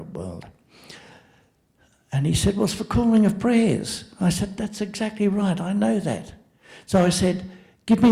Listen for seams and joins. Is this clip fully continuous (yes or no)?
yes